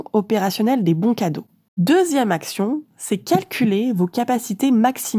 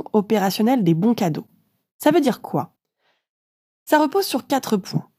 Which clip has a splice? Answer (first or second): first